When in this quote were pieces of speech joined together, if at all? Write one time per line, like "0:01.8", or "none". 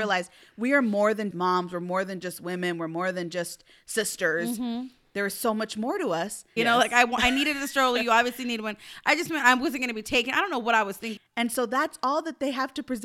0:01.3
0:06.6
0:11.2